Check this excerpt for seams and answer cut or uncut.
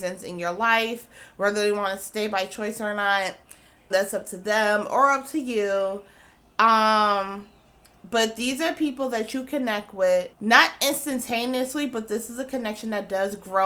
cut